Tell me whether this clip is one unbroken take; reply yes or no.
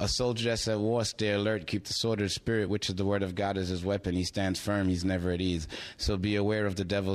yes